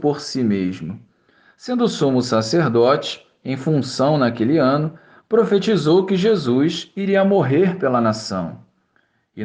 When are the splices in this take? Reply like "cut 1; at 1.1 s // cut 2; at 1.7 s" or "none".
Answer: none